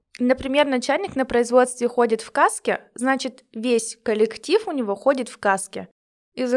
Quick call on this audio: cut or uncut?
uncut